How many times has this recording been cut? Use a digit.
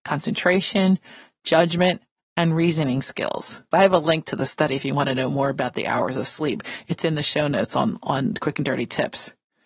1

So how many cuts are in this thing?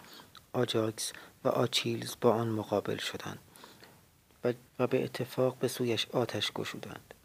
1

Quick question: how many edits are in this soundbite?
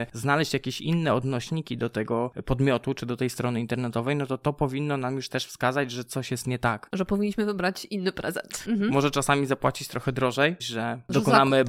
2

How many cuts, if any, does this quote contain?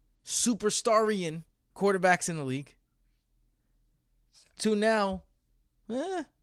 1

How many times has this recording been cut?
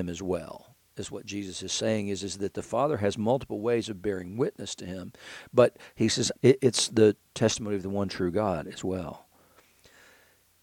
1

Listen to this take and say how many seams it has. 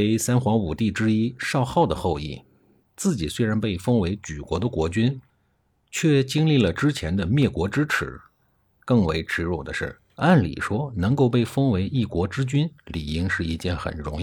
1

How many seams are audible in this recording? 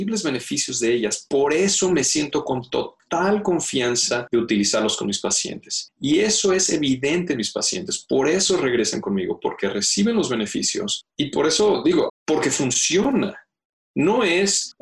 1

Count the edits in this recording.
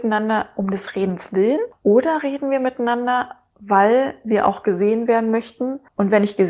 0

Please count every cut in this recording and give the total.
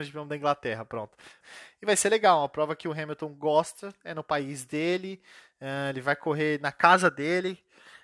1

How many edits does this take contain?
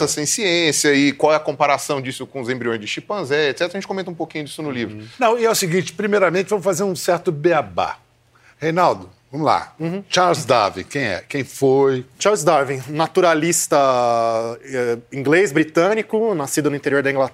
0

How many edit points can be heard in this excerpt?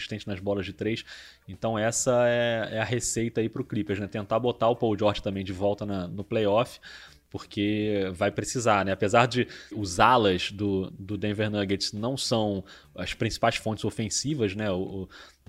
2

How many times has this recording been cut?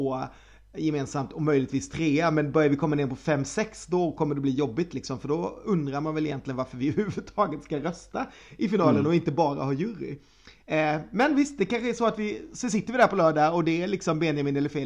0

